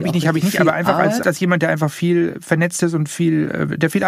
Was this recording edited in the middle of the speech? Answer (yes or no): yes